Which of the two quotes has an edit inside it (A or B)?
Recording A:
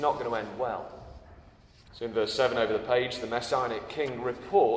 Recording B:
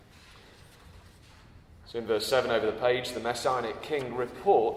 A